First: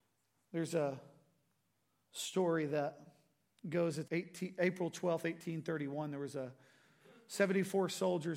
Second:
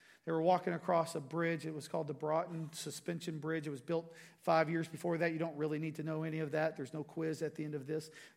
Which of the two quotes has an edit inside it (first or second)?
first